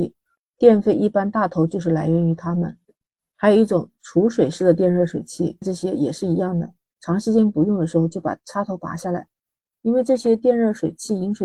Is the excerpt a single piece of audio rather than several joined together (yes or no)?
no